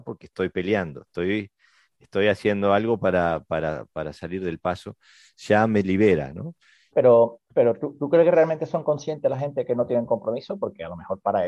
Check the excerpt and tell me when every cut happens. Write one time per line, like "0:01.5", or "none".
0:06.9